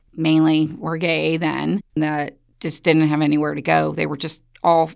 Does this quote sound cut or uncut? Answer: uncut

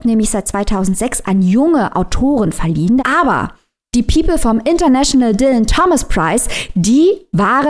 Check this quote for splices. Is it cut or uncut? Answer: cut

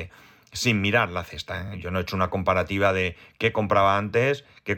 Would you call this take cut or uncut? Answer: uncut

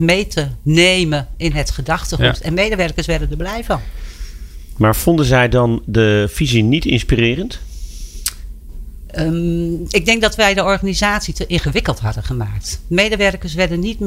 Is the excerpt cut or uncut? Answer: uncut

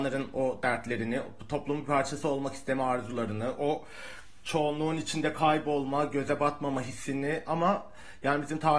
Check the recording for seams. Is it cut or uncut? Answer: uncut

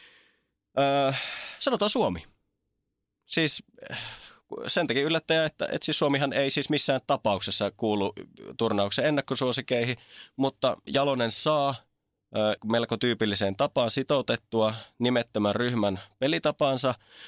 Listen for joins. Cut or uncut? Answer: cut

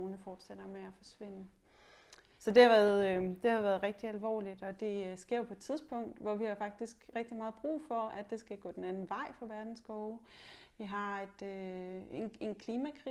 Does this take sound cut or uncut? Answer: cut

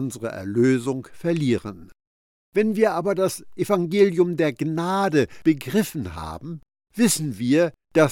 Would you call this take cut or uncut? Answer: uncut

